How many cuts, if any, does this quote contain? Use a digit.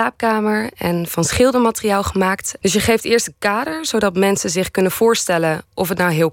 1